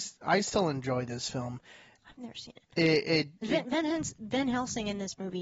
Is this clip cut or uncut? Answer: uncut